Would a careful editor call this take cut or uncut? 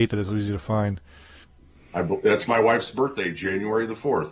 uncut